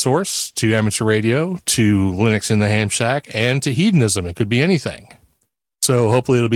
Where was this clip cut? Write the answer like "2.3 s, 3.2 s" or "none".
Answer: none